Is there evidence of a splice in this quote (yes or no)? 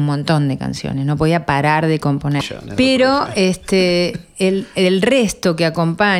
yes